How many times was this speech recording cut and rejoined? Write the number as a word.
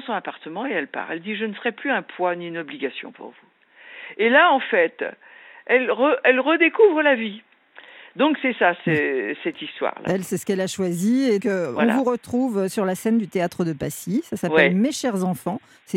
one